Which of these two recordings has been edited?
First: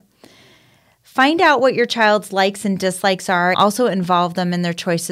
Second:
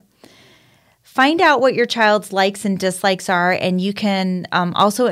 first; 1 cut; at 3.5 s

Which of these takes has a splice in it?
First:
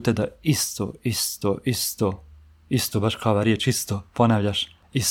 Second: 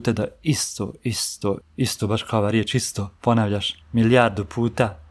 second; 2 cuts; at 1.6 s, 3.8 s

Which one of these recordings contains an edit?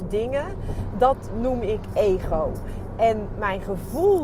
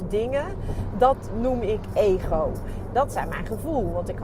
second; 1 cut; at 2.9 s

